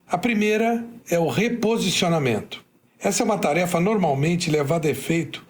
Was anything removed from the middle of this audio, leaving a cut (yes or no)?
no